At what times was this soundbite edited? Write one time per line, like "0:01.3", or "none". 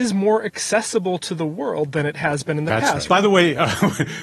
0:03.1